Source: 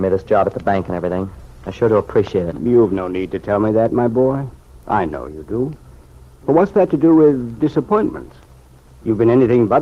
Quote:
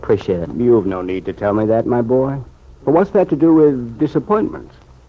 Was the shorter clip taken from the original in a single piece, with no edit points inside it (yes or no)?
no